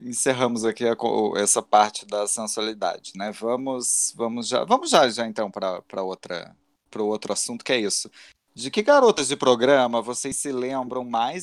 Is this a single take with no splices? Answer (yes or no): yes